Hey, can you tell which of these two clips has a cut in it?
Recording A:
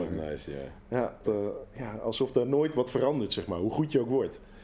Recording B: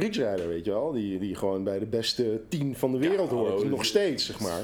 A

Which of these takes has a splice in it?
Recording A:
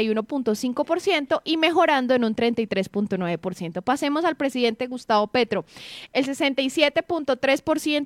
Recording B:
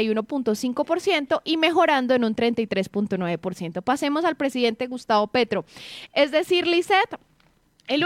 B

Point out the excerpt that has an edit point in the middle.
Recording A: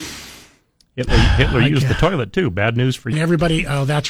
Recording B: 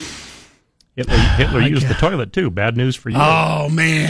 A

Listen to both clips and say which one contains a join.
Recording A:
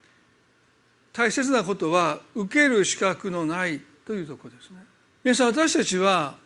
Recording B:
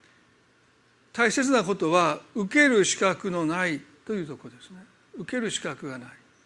A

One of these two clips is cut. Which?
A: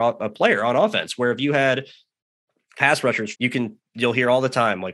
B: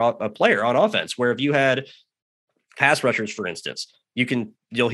A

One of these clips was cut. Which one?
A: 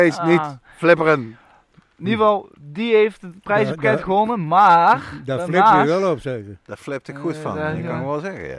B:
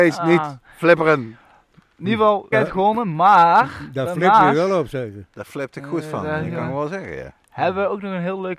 B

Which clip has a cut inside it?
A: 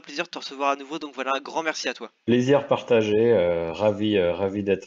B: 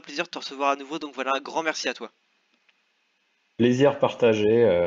A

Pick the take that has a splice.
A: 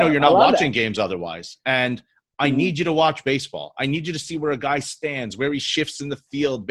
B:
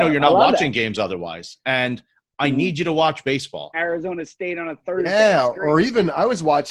B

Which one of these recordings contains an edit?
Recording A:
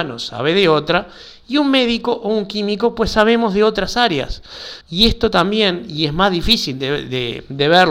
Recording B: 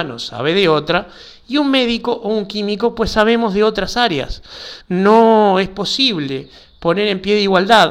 A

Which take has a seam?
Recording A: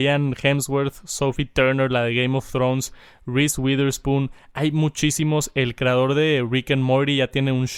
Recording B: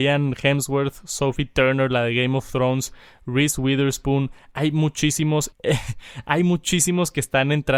B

